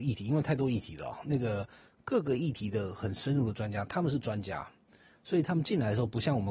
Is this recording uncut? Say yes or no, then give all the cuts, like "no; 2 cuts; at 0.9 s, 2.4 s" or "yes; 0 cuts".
yes; 0 cuts